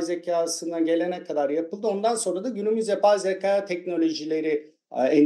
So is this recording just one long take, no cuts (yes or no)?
yes